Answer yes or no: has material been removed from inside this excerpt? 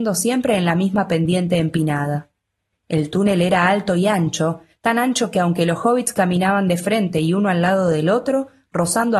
no